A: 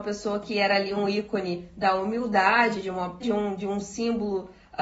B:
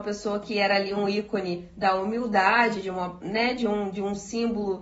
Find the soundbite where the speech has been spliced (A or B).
A